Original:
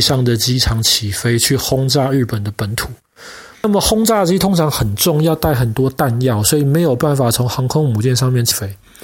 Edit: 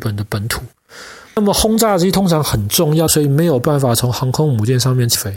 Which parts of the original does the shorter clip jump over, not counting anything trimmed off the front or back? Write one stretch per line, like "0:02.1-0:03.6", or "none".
0:05.3-0:06.4

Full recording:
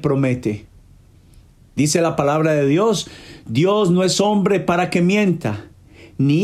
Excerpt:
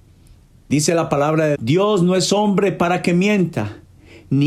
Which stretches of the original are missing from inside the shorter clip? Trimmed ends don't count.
0:02.6-0:03.4

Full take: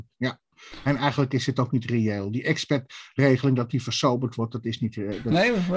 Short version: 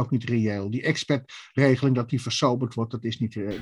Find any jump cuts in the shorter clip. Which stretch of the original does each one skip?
none

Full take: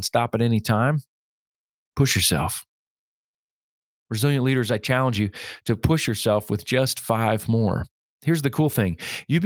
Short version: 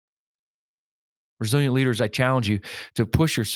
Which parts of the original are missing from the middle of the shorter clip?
none

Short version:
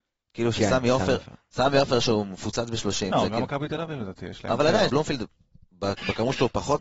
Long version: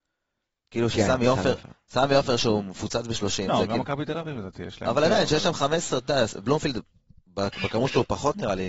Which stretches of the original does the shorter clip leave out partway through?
0:05.3-0:06.4

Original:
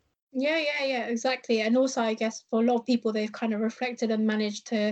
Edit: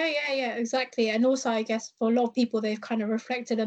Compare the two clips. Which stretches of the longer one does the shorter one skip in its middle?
none

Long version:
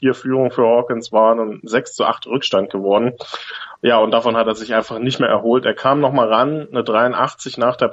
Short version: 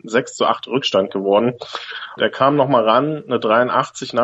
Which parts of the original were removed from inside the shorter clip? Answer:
0:03.8-0:05.6

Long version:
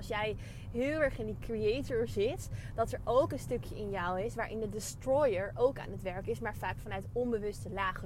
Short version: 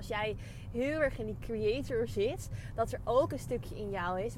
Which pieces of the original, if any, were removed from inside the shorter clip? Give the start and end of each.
none

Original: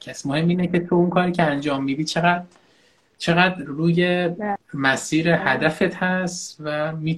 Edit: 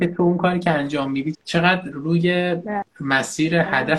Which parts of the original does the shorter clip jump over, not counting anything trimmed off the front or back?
0:02.1-0:03.1

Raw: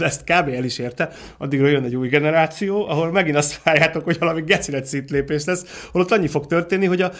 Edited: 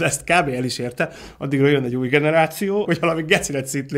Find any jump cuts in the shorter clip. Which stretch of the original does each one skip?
0:02.9-0:04.0

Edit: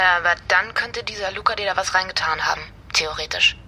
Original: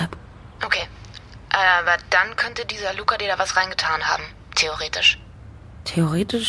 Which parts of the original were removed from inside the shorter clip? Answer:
none

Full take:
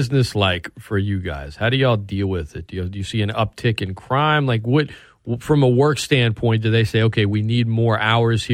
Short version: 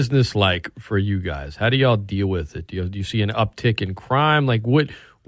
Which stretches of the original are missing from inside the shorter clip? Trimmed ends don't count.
none

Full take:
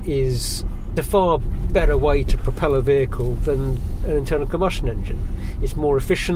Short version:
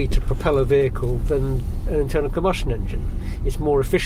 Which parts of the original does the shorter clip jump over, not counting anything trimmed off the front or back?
none

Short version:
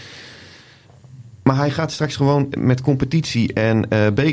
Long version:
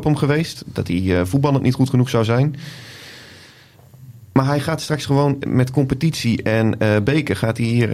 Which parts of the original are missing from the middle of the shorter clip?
none

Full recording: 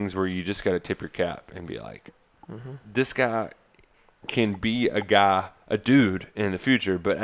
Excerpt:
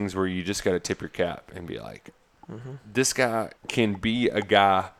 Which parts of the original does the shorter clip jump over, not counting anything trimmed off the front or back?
0:03.6-0:04.2

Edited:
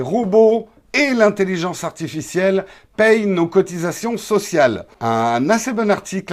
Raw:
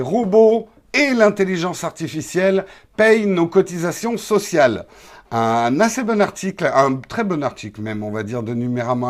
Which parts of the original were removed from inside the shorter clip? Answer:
0:04.9-0:05.2

